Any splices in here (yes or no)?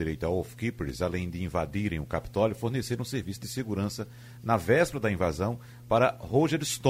no